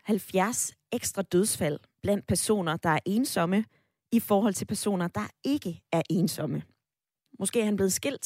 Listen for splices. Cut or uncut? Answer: cut